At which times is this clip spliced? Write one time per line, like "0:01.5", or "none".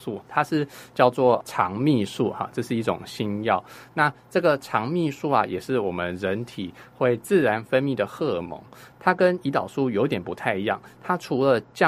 none

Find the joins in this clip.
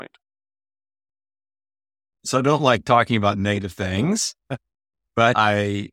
none

